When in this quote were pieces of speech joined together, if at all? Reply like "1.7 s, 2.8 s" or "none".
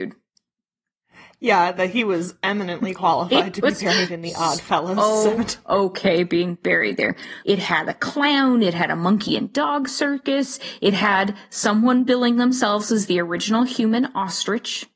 7.4 s